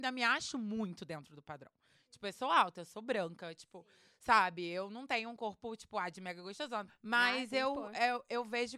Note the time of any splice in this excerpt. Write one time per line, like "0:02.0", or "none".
0:06.9

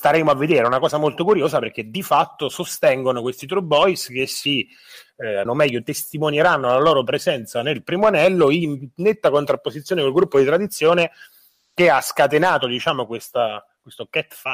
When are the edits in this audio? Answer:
0:05.5

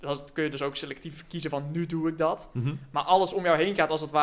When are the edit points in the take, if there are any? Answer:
none

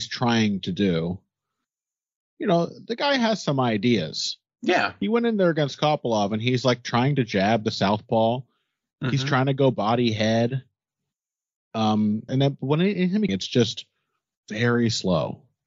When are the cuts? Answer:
0:12.3
0:13.3

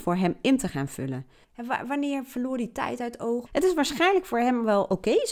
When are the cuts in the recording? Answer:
0:01.4
0:03.5

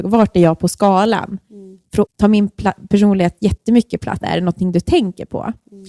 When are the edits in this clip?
0:02.1
0:04.2

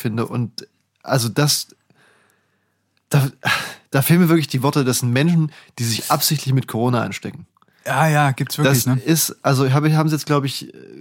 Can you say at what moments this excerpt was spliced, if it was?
none

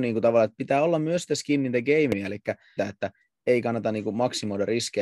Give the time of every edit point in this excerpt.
0:02.8

